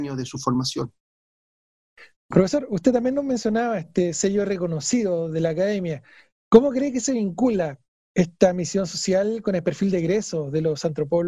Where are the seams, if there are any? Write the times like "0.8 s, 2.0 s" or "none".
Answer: none